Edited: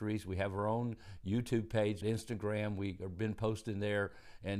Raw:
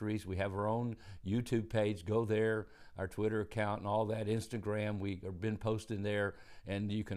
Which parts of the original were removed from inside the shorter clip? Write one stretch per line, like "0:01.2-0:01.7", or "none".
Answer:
0:02.0-0:04.2